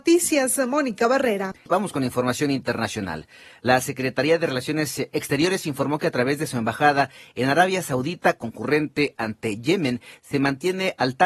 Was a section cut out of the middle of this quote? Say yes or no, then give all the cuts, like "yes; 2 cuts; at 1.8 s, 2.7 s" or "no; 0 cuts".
no; 0 cuts